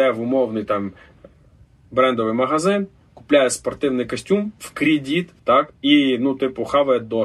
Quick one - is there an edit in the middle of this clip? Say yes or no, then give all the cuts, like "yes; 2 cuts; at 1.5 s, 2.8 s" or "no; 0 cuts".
yes; 1 cut; at 5.4 s